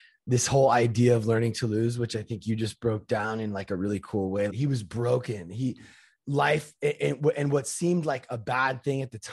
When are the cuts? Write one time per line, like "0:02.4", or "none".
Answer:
0:04.5